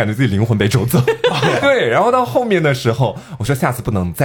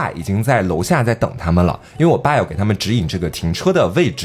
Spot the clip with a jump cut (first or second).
first